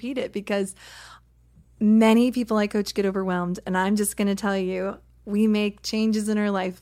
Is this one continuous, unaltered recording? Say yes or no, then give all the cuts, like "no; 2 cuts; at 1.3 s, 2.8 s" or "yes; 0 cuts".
yes; 0 cuts